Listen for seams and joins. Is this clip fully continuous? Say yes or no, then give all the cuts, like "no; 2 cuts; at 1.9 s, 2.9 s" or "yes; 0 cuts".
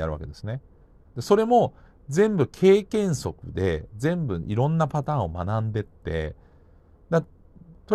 no; 1 cut; at 1.1 s